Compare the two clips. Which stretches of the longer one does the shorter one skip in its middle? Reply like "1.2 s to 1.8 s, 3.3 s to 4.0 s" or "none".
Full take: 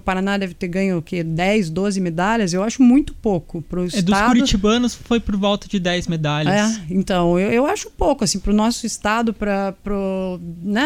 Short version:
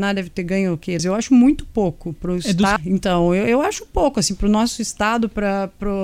1.2 s to 2.5 s, 4.2 s to 6.8 s